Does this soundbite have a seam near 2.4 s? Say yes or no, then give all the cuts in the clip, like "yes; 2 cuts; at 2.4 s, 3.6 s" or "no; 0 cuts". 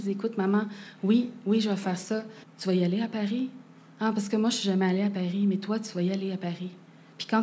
yes; 1 cut; at 2.4 s